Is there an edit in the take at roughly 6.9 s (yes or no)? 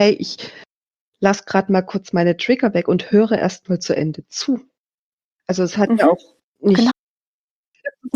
yes